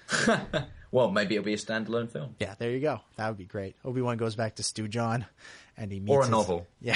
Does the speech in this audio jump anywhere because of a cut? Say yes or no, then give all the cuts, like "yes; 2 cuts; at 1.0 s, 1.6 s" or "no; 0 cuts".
no; 0 cuts